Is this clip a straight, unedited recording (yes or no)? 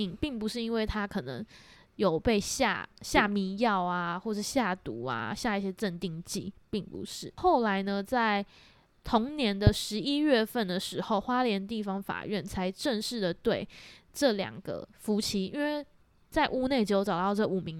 yes